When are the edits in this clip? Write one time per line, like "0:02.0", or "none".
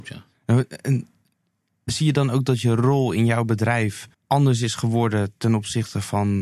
0:04.1